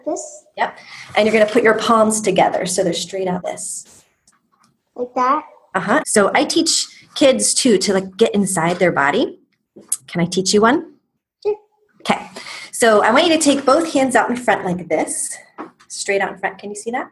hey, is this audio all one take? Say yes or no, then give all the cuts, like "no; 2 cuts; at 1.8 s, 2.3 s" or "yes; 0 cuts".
no; 3 cuts; at 3.4 s, 6.0 s, 10.0 s